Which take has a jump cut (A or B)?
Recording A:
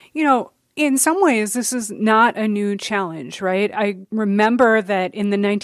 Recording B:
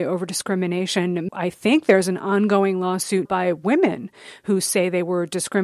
B